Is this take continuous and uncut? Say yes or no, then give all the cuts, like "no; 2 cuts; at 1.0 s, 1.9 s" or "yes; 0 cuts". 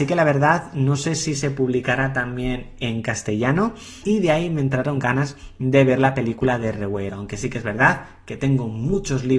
no; 2 cuts; at 4.0 s, 7.1 s